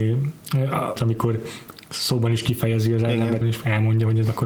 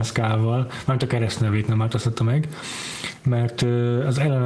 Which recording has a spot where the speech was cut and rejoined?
first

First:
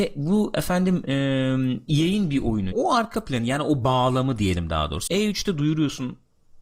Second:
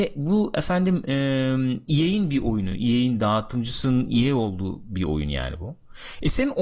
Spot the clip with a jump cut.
first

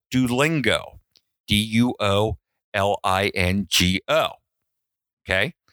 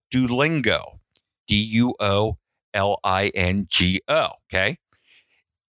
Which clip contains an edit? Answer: second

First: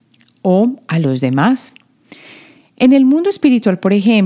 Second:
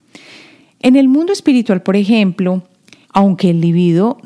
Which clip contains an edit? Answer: second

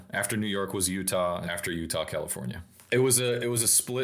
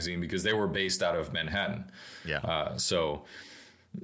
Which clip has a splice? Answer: first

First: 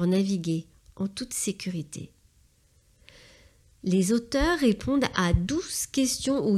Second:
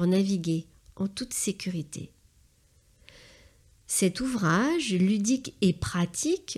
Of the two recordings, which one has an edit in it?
first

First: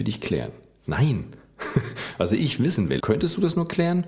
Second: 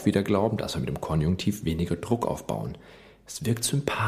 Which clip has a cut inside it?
first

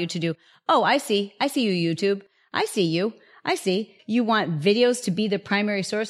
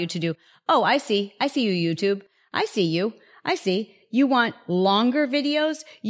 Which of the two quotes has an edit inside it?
first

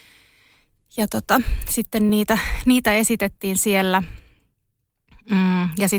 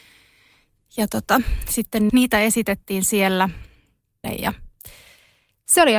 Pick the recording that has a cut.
second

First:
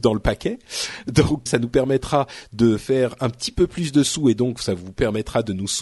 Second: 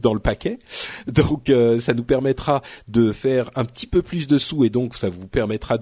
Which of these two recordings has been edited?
first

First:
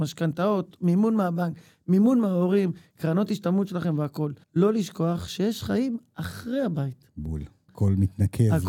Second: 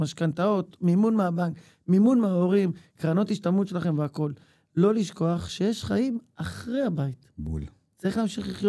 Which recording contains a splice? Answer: first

